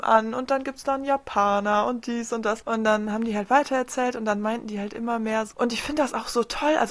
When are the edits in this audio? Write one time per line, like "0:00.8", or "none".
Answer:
0:02.6
0:05.5